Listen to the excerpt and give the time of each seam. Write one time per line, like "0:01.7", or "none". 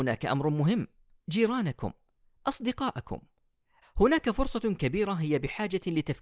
0:01.2
0:03.8